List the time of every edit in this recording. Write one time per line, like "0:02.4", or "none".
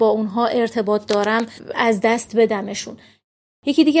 none